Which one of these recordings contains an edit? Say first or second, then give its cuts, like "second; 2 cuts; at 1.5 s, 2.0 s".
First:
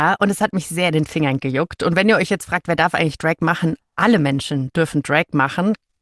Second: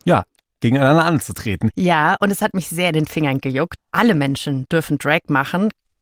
second; 2 cuts; at 1.7 s, 3.8 s